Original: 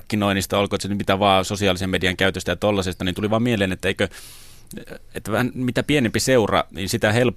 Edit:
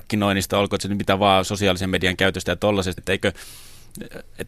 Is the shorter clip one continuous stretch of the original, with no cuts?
no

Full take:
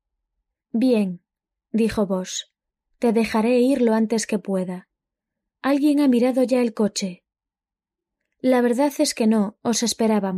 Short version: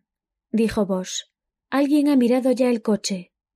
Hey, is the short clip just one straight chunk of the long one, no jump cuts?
no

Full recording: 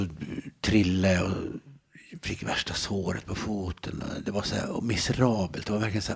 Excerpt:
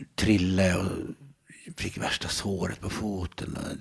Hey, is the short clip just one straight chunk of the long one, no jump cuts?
yes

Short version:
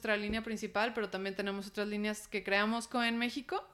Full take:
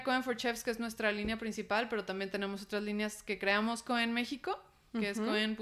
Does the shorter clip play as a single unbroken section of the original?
yes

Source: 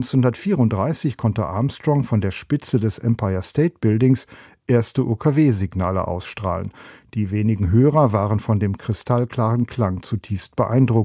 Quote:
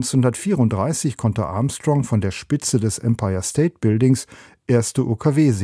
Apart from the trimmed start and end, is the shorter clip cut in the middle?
no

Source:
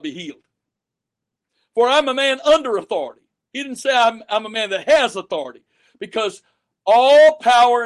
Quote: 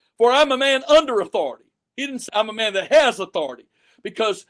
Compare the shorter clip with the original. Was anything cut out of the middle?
yes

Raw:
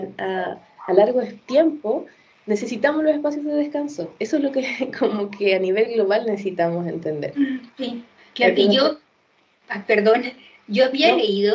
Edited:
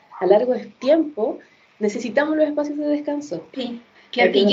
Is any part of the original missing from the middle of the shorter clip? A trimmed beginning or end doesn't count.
yes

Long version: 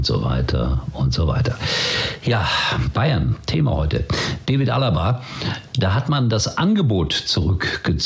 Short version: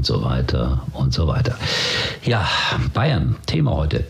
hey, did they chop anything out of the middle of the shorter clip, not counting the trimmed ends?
no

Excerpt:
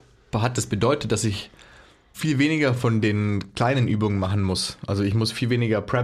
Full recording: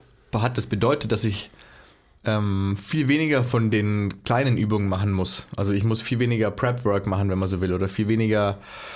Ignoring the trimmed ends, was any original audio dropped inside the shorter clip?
yes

